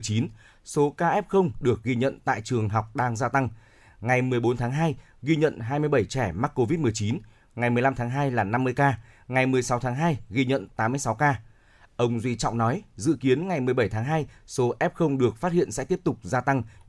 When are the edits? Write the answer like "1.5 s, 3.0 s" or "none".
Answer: none